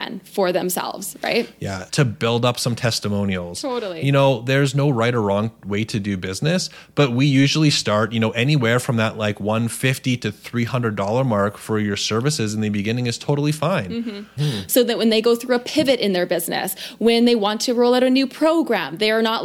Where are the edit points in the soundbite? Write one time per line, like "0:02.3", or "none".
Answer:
0:01.9
0:14.4